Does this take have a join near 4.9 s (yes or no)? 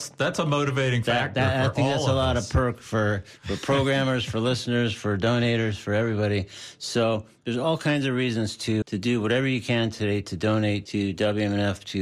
no